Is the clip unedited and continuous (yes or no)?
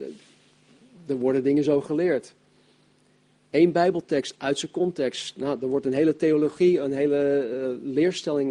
yes